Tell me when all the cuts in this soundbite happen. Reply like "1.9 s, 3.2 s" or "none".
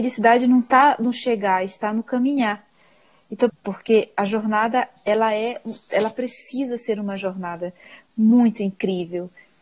3.5 s